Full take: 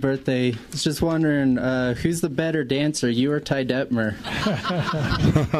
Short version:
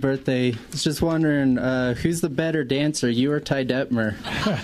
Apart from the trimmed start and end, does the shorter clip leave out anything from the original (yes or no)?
no